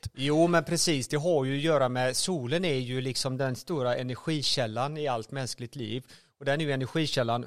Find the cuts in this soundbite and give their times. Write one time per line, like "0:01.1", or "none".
none